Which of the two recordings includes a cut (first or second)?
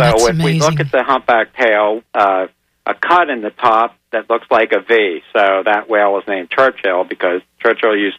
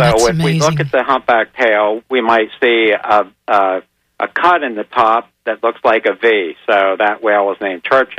first